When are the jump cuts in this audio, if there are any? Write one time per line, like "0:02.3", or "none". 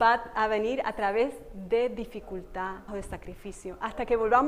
0:02.9